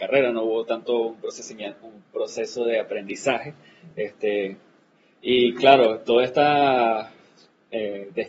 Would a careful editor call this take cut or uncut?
uncut